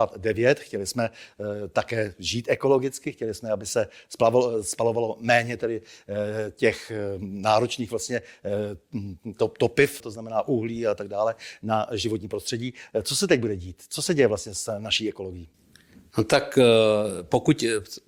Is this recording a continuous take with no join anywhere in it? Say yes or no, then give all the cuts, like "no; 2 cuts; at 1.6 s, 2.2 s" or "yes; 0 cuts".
no; 1 cut; at 10.0 s